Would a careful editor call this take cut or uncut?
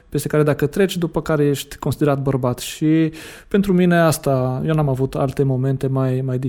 uncut